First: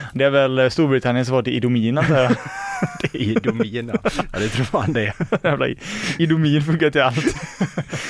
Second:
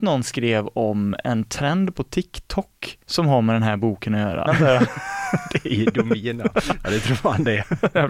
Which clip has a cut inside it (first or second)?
second